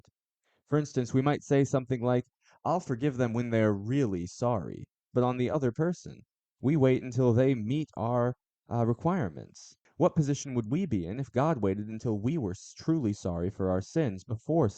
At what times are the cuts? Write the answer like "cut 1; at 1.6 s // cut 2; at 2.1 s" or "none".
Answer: cut 1; at 5.1 s